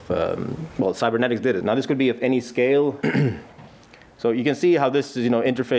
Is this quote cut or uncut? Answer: cut